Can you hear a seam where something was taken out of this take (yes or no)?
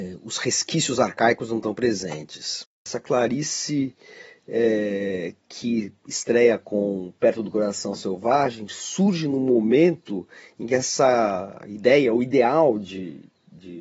no